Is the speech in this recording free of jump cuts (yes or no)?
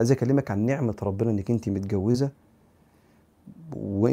yes